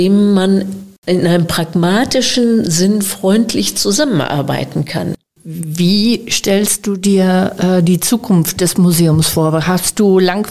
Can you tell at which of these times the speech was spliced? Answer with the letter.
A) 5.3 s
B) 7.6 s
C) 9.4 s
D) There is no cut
A